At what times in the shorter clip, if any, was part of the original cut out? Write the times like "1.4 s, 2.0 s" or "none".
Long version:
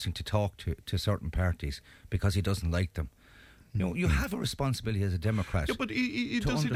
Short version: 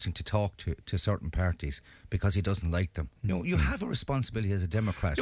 3.2 s